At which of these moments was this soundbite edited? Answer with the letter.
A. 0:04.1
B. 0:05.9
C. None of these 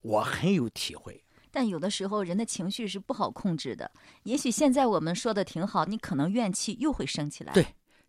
B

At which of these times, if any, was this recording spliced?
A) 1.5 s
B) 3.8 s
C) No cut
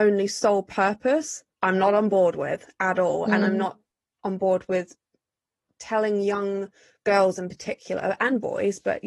A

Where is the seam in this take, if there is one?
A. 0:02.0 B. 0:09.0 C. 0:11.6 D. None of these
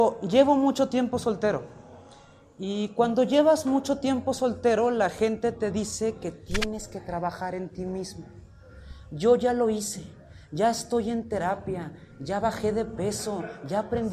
D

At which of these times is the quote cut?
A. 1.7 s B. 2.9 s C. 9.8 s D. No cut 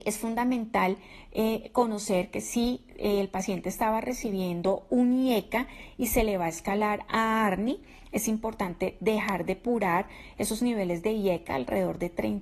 D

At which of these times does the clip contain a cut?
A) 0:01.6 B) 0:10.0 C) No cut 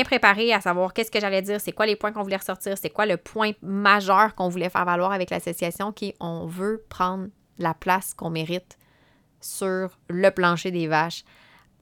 B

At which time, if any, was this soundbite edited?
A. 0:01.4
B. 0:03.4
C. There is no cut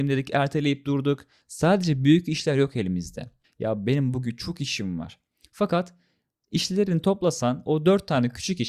B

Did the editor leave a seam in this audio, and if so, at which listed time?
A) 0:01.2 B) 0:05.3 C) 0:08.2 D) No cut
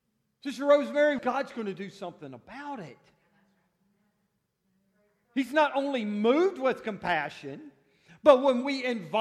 A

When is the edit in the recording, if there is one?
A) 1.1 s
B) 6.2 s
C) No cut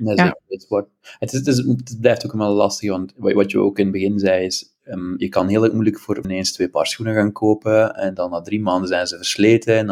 B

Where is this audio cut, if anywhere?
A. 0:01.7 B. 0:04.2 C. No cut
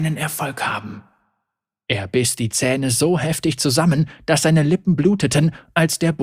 C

